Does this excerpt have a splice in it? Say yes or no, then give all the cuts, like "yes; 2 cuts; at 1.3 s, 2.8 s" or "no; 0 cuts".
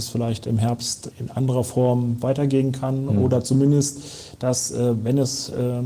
yes; 1 cut; at 1.1 s